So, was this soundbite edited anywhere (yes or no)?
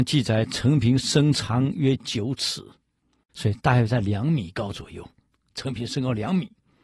yes